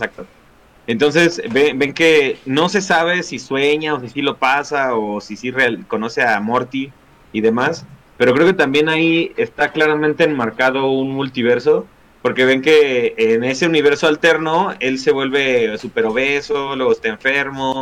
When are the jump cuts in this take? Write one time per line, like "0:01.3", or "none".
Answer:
none